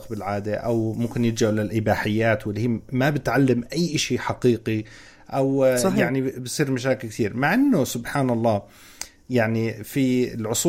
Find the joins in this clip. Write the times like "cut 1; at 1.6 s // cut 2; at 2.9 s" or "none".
none